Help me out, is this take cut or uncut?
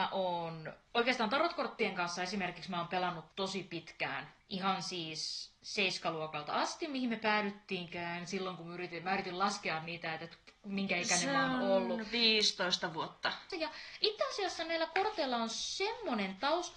cut